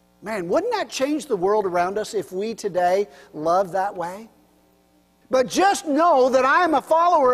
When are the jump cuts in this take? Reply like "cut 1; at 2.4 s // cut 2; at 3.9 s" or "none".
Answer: cut 1; at 5.2 s